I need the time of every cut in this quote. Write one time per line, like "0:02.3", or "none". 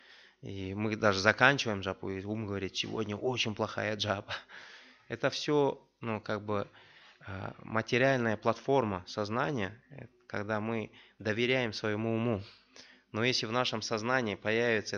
none